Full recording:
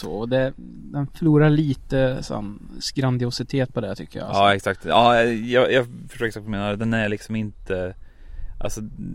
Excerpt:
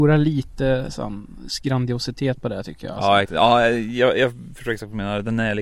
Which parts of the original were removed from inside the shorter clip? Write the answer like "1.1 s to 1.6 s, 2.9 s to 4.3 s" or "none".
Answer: 4.6 s to 4.8 s